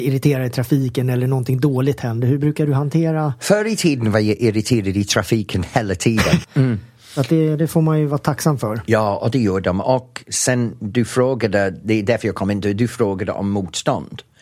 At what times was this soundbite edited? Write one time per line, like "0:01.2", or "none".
0:06.4